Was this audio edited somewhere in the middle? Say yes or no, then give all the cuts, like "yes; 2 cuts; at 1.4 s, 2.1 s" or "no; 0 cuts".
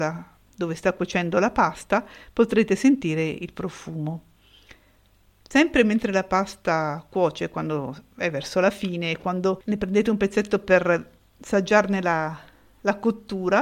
no; 0 cuts